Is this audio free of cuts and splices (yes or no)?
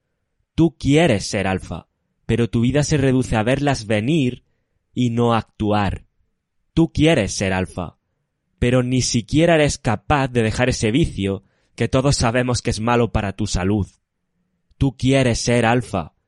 no